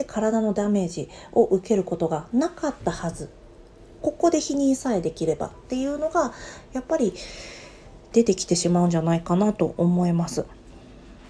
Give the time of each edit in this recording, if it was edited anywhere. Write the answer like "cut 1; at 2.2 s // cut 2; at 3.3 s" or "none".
none